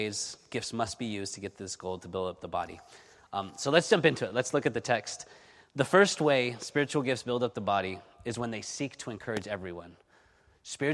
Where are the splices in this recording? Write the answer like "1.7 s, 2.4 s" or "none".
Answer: none